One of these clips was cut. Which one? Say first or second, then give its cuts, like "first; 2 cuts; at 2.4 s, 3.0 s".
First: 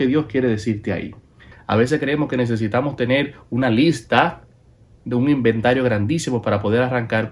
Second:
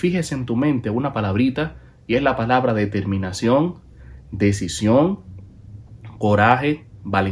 first; 1 cut; at 1.5 s